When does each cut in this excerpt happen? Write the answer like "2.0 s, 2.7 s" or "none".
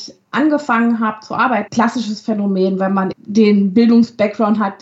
1.7 s, 3.1 s